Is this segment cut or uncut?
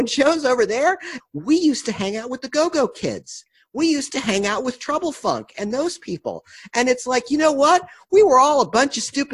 cut